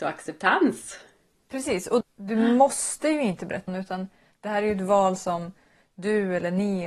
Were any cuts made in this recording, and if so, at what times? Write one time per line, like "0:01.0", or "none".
0:02.0
0:03.7